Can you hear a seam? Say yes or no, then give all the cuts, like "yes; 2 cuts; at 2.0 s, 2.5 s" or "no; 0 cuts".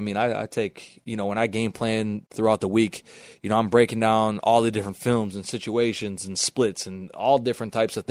no; 0 cuts